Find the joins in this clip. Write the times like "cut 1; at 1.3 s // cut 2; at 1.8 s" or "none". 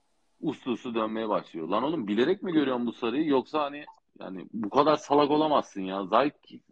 none